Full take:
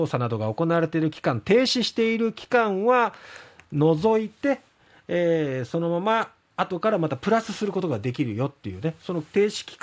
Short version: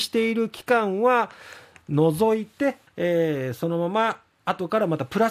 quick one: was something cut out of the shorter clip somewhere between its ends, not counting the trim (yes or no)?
yes